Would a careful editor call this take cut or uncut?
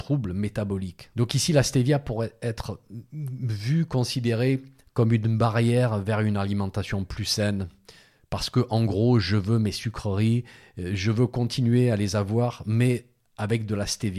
cut